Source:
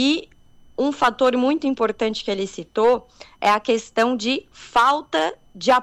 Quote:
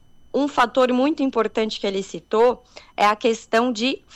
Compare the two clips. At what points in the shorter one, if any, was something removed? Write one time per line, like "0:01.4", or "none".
none